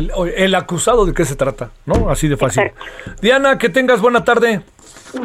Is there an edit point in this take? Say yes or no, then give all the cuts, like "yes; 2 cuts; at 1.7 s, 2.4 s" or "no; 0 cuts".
no; 0 cuts